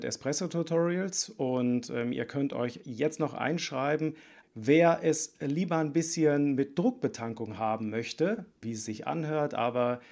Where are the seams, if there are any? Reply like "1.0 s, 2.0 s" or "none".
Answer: 4.4 s, 8.6 s